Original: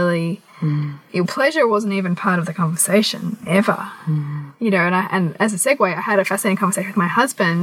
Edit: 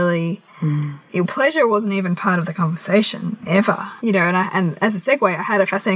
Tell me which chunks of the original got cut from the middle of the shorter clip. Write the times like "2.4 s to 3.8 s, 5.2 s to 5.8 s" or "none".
4.0 s to 4.6 s